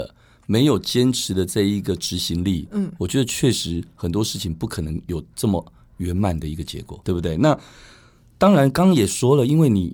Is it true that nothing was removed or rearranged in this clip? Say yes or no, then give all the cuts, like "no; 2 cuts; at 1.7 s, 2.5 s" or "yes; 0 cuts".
no; 1 cut; at 7.0 s